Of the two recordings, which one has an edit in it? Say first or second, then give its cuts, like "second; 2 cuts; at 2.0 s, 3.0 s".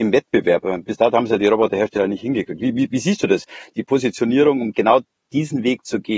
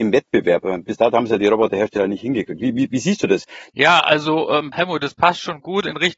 second; 2 cuts; at 3.7 s, 4.7 s